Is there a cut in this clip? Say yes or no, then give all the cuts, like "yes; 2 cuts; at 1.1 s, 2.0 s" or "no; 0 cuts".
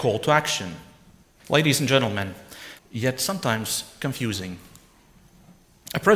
yes; 2 cuts; at 1.4 s, 2.8 s